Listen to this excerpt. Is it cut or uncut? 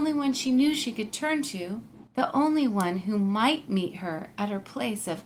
cut